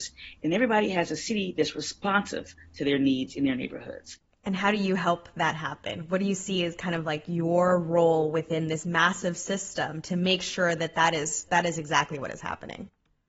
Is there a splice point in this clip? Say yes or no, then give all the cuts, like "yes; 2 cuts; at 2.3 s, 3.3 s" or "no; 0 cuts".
yes; 1 cut; at 11.5 s